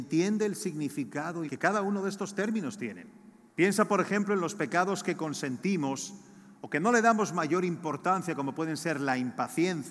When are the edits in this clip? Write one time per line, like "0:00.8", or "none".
0:01.5
0:03.5